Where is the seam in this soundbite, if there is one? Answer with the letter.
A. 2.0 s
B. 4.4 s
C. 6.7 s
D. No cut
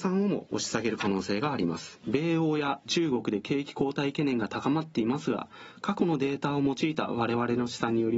A